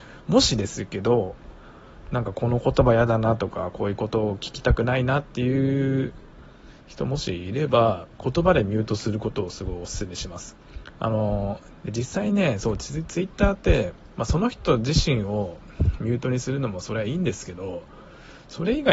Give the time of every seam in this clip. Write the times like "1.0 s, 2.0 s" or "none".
none

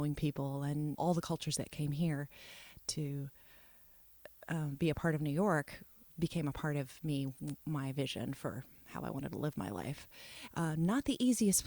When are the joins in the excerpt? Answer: 1.0 s, 10.5 s

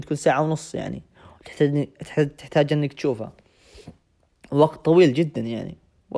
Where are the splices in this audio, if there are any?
none

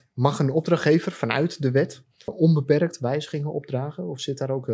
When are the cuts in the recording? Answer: 2.3 s

